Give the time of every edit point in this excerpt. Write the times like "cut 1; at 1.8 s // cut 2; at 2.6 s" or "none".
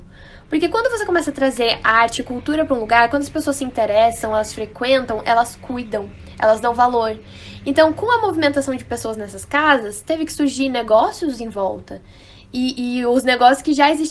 none